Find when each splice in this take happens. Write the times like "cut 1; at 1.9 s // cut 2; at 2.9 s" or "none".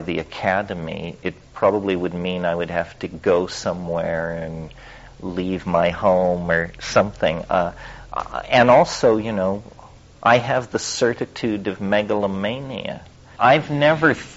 cut 1; at 13.4 s